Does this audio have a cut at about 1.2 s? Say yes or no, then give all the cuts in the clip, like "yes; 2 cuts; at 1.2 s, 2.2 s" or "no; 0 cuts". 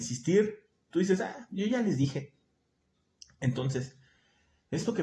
no; 0 cuts